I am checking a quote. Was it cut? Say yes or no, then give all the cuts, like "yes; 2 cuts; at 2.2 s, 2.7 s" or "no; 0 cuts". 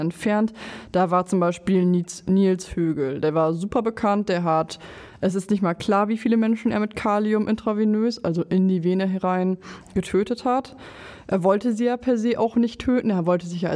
no; 0 cuts